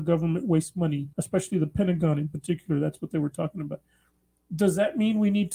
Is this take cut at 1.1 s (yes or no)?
yes